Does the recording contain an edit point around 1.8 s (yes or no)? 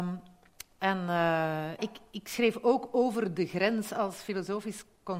yes